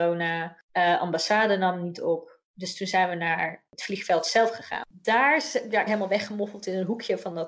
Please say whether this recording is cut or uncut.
cut